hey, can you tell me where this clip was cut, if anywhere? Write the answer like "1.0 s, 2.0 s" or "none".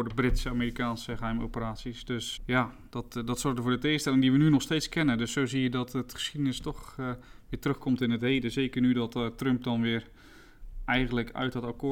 2.4 s